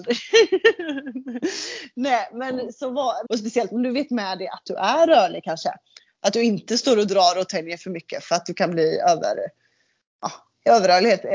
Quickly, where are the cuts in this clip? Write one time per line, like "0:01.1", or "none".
0:03.3